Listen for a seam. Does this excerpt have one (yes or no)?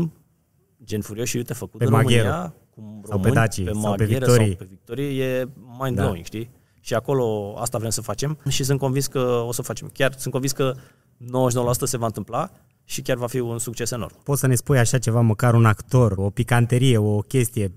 yes